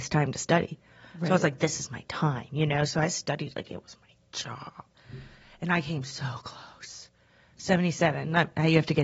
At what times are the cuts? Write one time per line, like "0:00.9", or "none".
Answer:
none